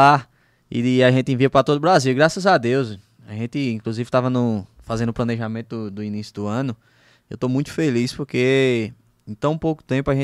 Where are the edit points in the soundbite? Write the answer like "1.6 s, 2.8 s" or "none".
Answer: none